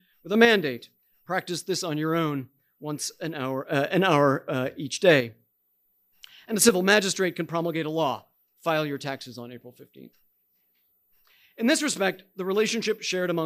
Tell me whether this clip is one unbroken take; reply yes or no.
yes